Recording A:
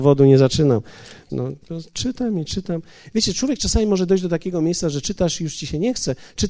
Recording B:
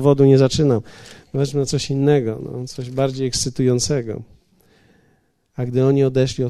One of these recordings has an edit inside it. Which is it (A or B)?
A